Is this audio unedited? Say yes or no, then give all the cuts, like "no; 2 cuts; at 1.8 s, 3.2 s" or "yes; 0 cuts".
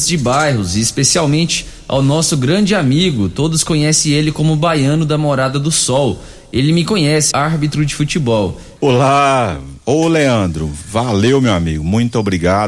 no; 2 cuts; at 7.3 s, 8.8 s